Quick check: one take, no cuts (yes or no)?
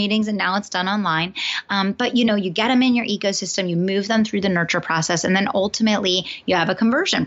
yes